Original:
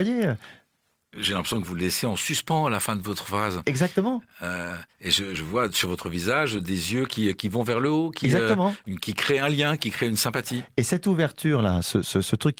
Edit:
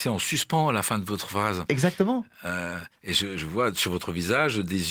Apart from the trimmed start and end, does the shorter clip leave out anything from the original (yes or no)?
no